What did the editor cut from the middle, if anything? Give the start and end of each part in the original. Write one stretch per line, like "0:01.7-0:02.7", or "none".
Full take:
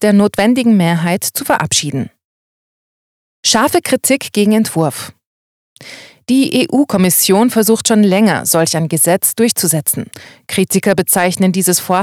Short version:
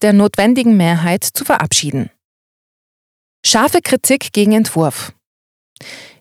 none